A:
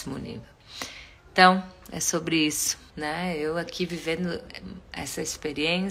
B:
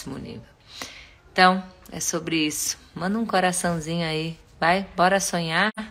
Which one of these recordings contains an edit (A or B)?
A